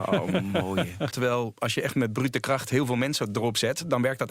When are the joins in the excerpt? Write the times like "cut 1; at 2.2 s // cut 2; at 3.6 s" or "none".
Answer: cut 1; at 1.1 s